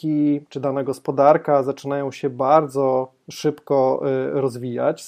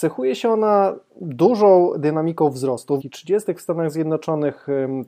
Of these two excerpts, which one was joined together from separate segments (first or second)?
second